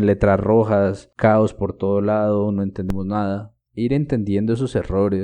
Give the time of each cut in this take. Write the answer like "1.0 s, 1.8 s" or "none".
3.7 s